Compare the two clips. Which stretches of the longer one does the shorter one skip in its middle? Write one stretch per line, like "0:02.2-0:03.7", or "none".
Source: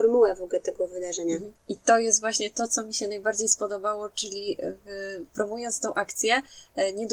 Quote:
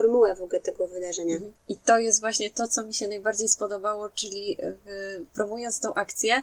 none